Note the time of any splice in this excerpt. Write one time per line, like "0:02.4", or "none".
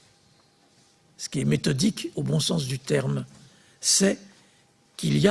none